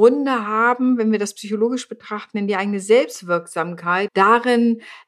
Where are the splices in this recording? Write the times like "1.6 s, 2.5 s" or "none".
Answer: 4.1 s